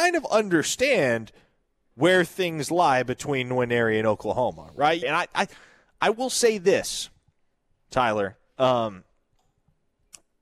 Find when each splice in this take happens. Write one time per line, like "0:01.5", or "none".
0:05.0